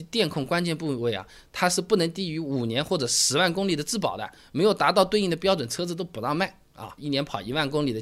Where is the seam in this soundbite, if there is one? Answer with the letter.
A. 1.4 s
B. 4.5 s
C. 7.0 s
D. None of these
C